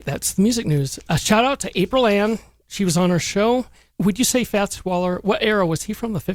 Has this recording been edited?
yes; 1 cut; at 3.9 s

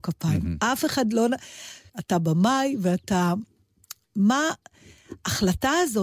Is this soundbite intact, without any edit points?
no; 1 cut; at 1.9 s

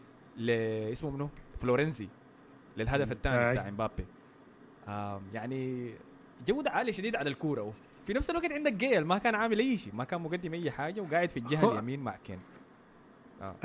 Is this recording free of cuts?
yes; 0 cuts

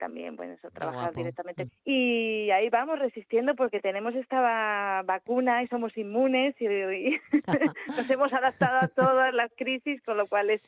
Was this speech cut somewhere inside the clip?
yes; 1 cut; at 1.7 s

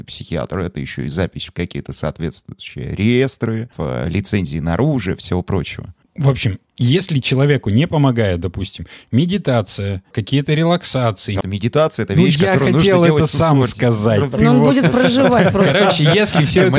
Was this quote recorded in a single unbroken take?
no; 3 cuts; at 3.7 s, 6.0 s, 11.4 s

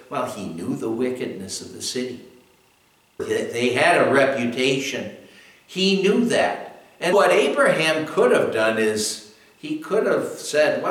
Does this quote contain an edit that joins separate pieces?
yes; 2 cuts; at 3.2 s, 7.1 s

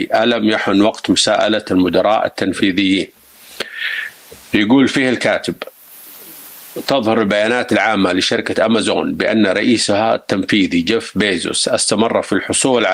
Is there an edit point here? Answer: yes; 1 cut; at 4.4 s

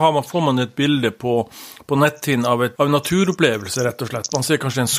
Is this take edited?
yes; 1 cut; at 2.8 s

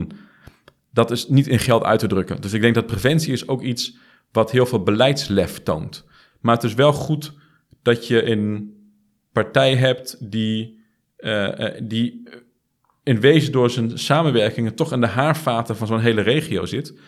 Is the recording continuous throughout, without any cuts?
no; 1 cut; at 6.3 s

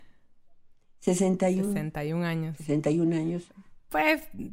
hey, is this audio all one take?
yes; 0 cuts

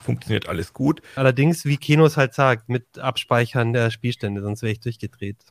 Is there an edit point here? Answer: yes; 1 cut; at 1.2 s

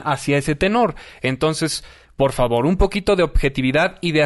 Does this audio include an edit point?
no; 0 cuts

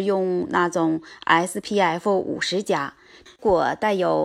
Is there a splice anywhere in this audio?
yes; 1 cut; at 3.3 s

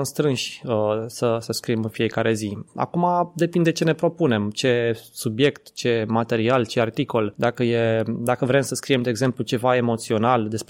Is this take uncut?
yes; 0 cuts

